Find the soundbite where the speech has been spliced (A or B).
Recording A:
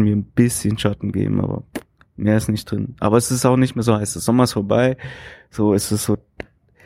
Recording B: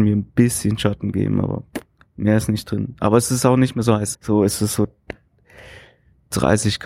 B